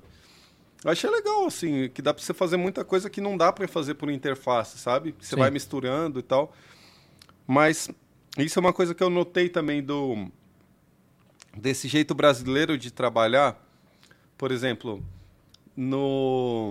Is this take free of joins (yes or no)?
yes